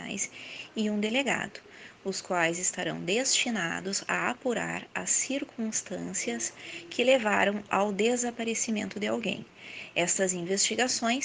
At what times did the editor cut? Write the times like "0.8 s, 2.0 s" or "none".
none